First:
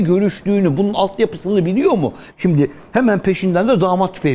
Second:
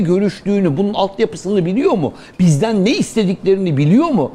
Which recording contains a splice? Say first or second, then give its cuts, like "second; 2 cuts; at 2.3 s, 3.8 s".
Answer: first; 1 cut; at 2.3 s